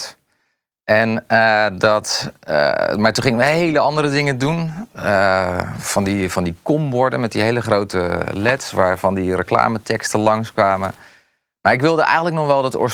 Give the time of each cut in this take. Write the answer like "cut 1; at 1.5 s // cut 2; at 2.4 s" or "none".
none